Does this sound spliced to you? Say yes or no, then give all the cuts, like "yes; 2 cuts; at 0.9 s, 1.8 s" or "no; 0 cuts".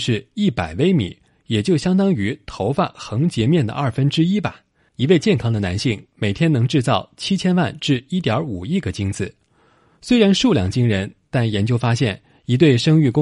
no; 0 cuts